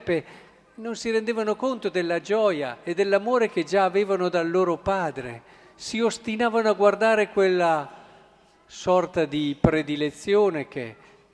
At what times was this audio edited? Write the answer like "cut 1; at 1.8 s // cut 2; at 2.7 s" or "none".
none